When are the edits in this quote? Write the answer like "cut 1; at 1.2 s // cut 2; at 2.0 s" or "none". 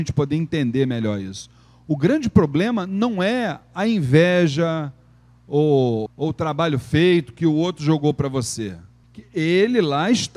cut 1; at 6.1 s // cut 2; at 9.0 s